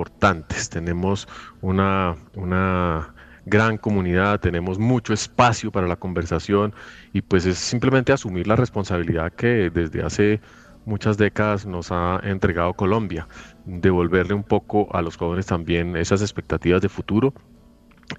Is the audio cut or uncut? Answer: uncut